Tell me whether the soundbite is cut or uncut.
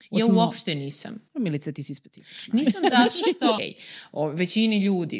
cut